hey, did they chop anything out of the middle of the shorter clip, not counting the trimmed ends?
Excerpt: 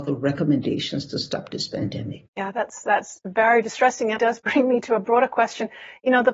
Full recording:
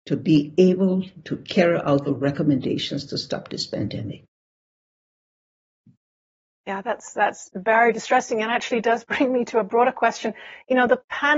yes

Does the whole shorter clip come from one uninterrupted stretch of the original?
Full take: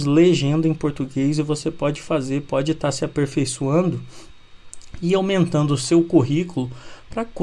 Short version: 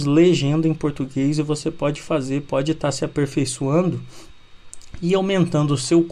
yes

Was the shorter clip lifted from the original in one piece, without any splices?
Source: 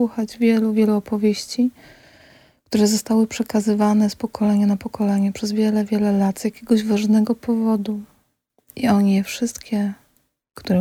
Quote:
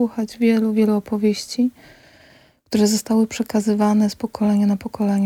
yes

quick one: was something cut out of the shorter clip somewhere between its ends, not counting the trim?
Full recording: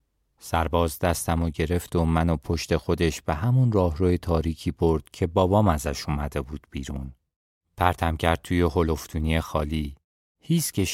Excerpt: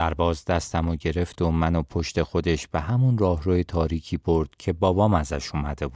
no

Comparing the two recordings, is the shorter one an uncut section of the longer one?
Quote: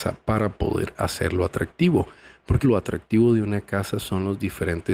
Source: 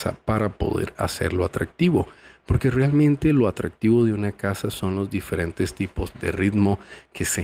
no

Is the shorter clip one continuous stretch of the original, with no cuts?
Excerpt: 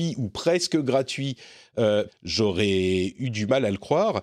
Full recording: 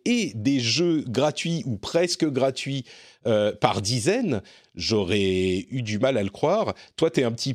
no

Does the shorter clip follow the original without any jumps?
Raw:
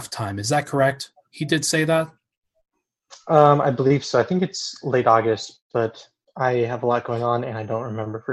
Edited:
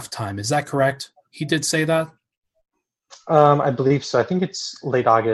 yes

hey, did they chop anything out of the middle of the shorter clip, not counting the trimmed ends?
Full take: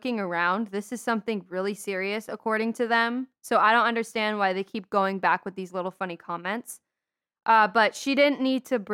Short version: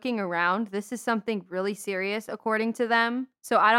no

